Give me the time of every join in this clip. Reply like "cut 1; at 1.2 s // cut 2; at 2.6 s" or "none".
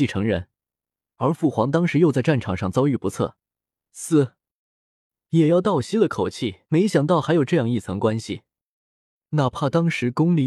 cut 1; at 3.7 s // cut 2; at 6.6 s